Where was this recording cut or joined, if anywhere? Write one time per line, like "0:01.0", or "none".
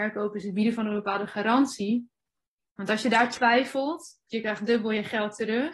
0:02.6
0:04.3